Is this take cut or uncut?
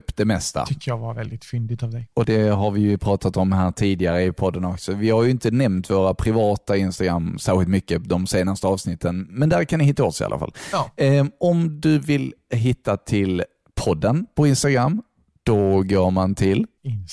uncut